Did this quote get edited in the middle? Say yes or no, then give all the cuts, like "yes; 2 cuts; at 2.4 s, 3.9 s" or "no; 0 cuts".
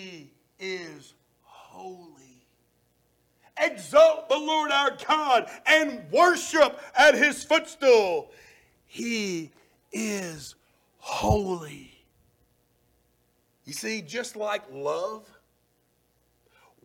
no; 0 cuts